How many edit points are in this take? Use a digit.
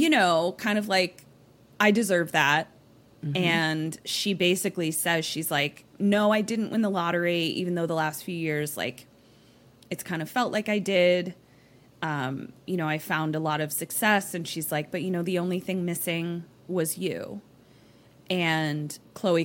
0